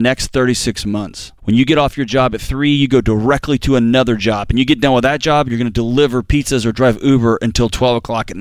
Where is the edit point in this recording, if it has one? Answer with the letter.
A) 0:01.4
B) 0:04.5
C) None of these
A